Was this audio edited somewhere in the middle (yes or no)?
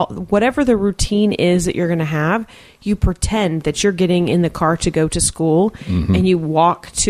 no